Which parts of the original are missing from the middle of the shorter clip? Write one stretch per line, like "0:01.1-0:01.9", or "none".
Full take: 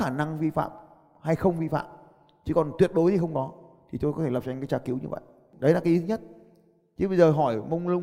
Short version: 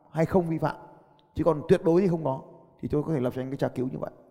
none